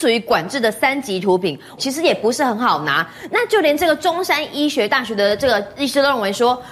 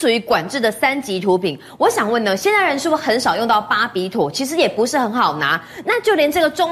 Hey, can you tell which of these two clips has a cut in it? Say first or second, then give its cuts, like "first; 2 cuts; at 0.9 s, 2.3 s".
first; 1 cut; at 1.8 s